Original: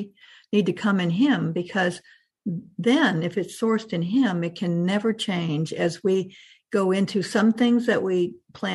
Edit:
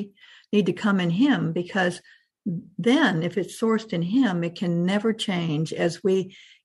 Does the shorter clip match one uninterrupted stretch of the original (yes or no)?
yes